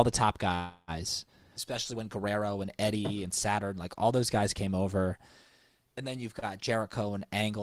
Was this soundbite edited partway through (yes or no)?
yes